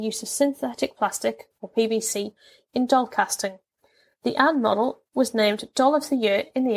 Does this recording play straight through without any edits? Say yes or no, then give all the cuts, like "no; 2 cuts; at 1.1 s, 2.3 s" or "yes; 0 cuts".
yes; 0 cuts